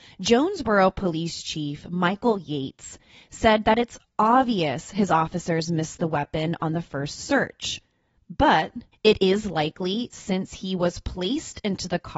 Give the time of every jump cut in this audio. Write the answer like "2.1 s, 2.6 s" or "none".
8.9 s